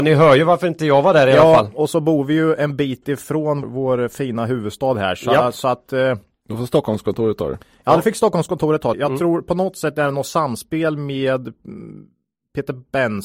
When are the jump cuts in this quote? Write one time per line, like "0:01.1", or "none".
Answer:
0:03.6
0:08.9